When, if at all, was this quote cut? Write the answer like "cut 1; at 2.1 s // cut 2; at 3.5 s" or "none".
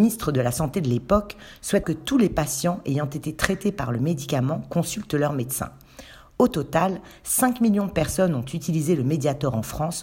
cut 1; at 1.8 s